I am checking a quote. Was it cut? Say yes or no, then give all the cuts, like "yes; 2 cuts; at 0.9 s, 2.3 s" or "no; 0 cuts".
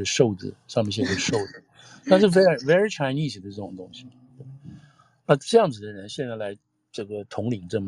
no; 0 cuts